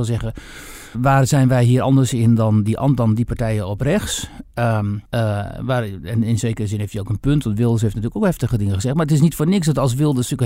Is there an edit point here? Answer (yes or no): yes